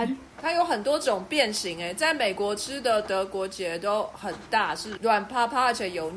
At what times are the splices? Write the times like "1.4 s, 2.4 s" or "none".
none